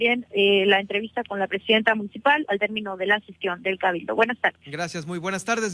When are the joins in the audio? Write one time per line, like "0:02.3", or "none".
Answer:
none

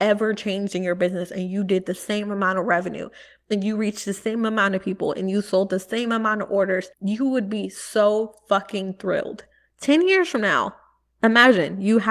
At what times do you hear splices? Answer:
0:06.9
0:09.7

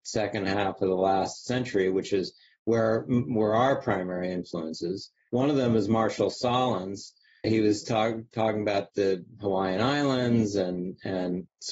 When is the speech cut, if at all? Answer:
0:07.4

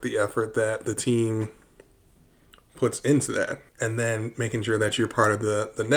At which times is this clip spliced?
0:03.7

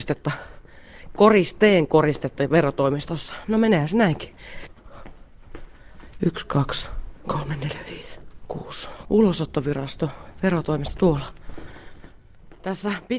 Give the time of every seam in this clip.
0:06.2
0:09.0

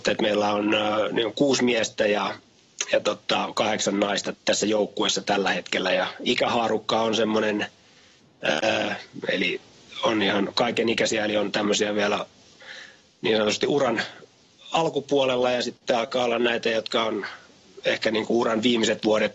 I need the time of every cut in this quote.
0:04.3
0:09.2

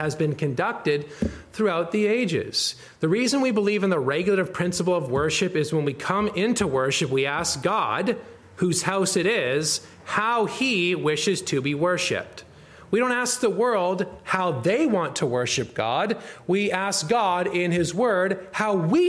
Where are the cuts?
none

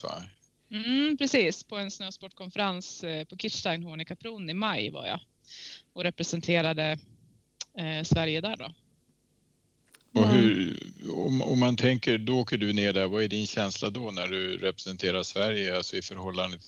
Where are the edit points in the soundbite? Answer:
none

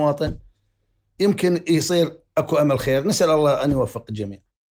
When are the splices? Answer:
0:01.2

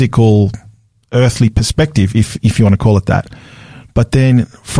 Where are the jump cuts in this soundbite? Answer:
none

